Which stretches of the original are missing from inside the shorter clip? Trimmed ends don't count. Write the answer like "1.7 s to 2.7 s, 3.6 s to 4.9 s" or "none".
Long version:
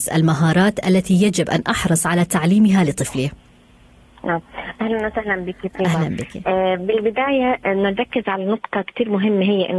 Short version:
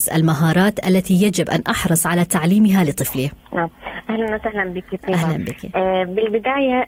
3.4 s to 4.2 s